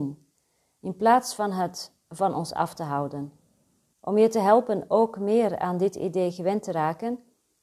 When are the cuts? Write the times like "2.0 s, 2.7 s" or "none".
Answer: 3.9 s